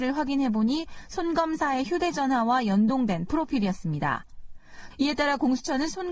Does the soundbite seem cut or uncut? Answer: cut